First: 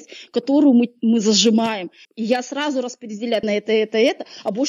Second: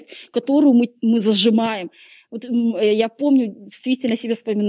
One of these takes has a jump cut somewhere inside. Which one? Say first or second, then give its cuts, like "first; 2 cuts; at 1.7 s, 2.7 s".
first; 2 cuts; at 2.0 s, 3.4 s